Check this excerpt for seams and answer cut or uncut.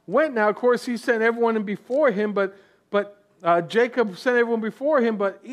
uncut